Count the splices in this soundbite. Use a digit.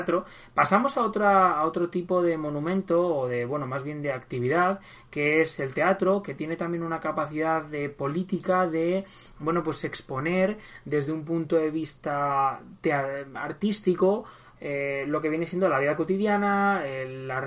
0